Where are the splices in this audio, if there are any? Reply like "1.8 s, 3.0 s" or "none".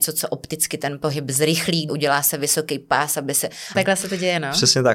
1.9 s, 3.7 s